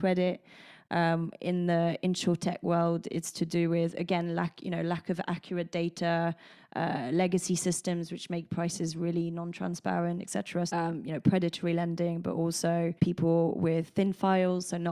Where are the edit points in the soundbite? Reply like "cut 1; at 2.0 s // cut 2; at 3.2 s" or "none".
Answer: cut 1; at 10.7 s // cut 2; at 13.0 s